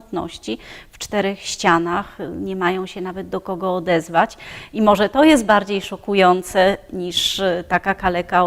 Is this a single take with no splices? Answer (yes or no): yes